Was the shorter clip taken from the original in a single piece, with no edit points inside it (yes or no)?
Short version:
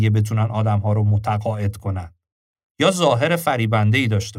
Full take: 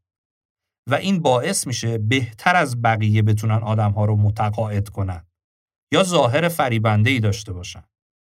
yes